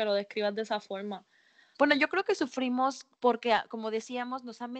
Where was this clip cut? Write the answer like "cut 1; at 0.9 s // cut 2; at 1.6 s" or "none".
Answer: cut 1; at 1.7 s // cut 2; at 3.1 s